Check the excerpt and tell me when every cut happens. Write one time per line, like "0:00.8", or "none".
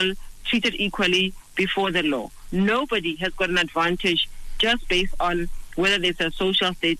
none